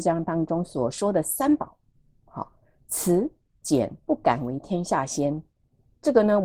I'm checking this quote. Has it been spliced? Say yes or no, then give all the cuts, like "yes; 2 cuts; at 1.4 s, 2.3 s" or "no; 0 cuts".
yes; 1 cut; at 4.0 s